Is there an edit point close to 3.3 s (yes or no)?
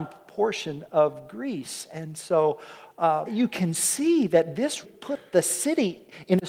yes